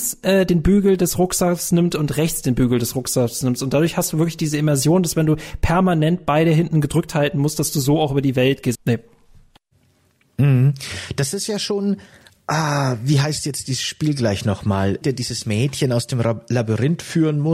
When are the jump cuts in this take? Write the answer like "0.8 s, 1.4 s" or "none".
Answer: 8.7 s, 15.0 s